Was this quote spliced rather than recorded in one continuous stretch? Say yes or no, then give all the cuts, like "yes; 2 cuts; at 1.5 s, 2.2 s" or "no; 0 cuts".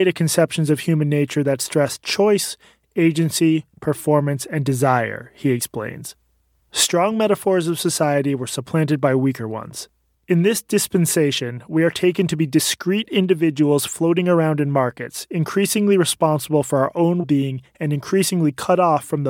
yes; 2 cuts; at 10.1 s, 17.2 s